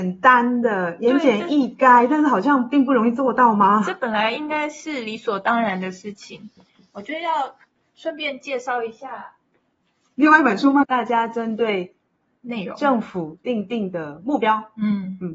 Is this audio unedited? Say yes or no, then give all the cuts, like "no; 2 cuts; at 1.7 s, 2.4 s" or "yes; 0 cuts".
no; 1 cut; at 10.8 s